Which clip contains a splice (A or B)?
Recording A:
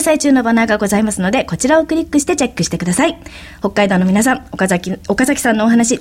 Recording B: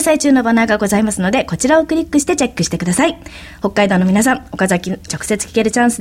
B